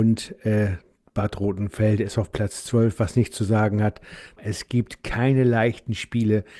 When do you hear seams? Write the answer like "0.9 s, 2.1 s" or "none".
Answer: 4.4 s